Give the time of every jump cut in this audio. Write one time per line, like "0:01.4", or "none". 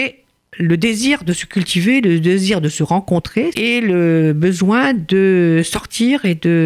0:03.5